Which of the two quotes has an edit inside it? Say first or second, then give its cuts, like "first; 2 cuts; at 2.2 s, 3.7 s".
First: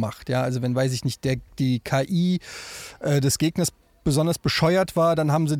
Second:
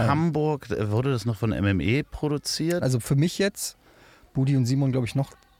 second; 1 cut; at 2.8 s